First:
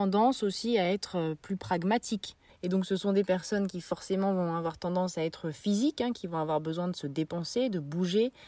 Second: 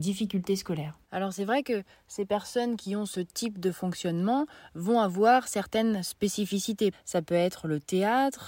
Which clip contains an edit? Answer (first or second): second